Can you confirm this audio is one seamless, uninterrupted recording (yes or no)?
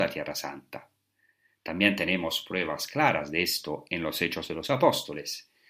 yes